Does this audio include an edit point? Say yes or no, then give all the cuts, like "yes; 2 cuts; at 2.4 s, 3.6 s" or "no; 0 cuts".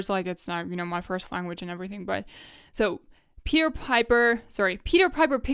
no; 0 cuts